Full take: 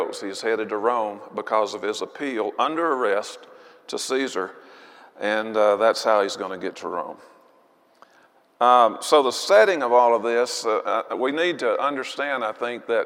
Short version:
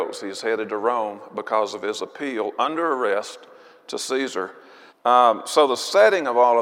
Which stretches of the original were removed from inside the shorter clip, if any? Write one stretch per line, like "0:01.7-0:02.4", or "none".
0:04.9-0:08.4